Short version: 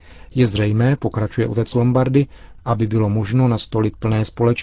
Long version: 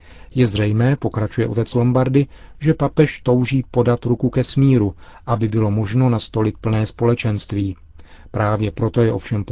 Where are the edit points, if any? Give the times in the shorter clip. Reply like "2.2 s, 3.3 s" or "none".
2.6 s